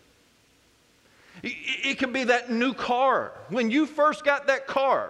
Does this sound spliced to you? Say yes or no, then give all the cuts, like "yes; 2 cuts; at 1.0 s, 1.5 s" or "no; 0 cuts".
no; 0 cuts